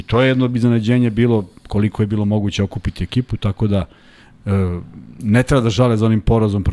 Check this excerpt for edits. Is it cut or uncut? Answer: uncut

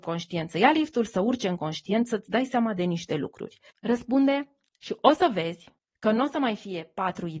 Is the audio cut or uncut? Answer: cut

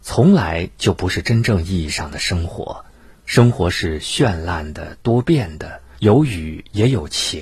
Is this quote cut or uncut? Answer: cut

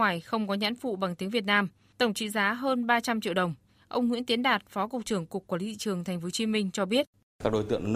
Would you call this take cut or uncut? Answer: uncut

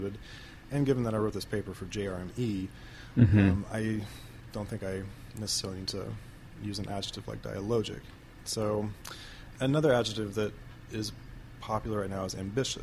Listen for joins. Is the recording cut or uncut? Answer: uncut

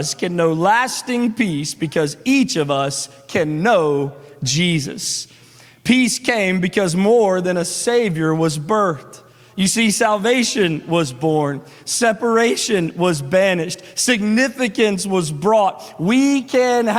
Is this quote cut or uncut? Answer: uncut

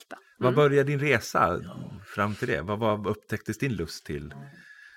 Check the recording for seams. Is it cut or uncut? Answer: uncut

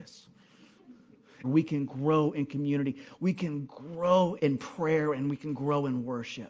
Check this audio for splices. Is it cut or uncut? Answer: cut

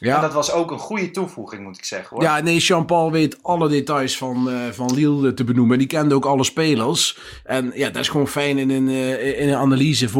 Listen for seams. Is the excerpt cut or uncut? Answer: uncut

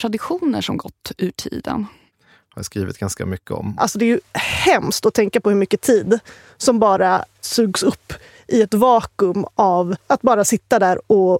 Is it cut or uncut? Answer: cut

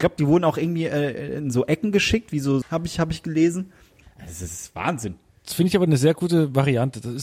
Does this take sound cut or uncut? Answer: cut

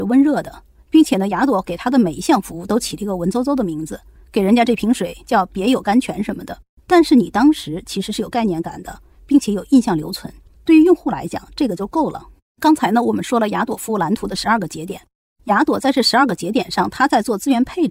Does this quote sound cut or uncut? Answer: uncut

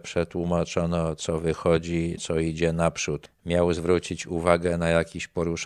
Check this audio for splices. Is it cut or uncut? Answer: cut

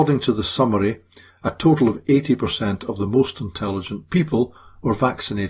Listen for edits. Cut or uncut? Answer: uncut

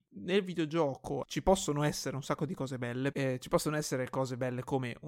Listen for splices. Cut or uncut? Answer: cut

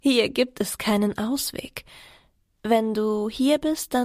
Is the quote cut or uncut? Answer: uncut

